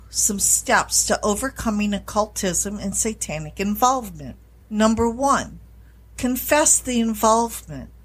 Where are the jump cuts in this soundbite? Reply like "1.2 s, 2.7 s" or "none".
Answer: none